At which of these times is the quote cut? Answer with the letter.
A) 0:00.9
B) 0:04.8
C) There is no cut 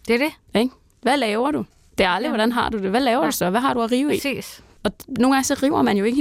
B